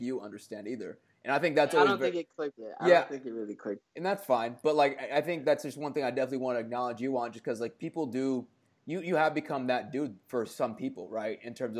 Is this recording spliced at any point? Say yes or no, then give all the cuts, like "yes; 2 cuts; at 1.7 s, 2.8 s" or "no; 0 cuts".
no; 0 cuts